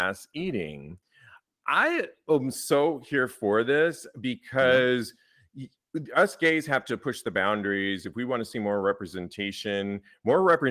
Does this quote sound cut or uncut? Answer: uncut